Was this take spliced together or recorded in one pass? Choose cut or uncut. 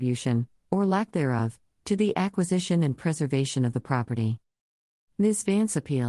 uncut